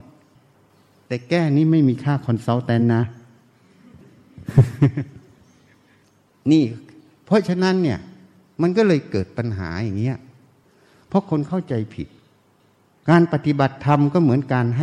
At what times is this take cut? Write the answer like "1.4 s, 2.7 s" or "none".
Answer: none